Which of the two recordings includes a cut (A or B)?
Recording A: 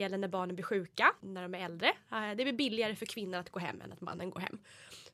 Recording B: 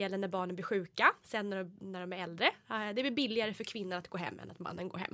A